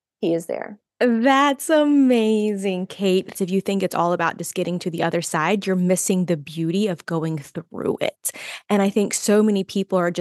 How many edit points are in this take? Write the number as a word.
one